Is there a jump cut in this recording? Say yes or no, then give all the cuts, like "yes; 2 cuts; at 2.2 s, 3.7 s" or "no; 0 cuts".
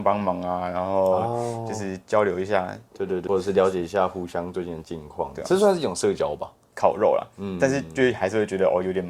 yes; 2 cuts; at 3.3 s, 6.7 s